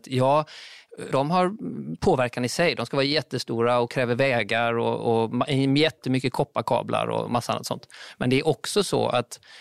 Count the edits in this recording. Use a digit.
1